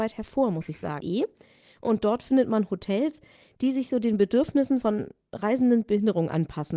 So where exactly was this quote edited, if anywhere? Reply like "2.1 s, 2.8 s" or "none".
1.0 s